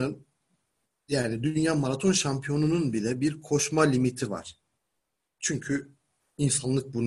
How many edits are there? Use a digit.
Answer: 0